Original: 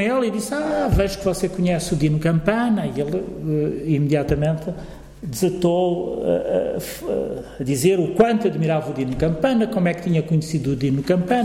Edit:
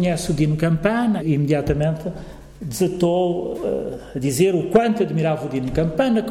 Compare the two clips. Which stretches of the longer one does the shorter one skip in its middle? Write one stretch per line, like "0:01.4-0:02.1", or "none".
0:02.8-0:03.8
0:06.2-0:07.0